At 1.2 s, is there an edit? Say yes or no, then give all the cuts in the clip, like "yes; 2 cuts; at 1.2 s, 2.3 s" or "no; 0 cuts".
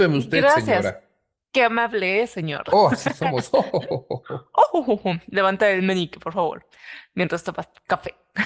no; 0 cuts